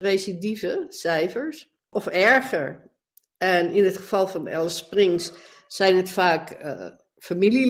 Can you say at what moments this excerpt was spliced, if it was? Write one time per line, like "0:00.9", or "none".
none